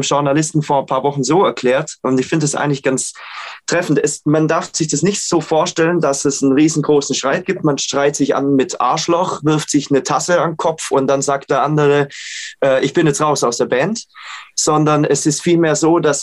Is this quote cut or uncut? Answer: uncut